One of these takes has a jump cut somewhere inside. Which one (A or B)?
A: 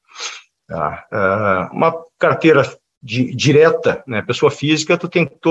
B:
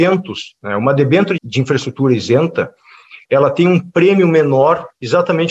B